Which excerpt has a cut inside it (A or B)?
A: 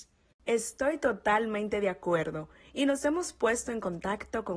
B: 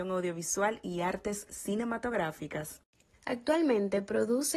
B